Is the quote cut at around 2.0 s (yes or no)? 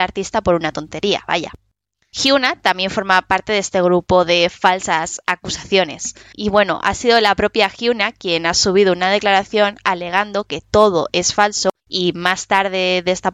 no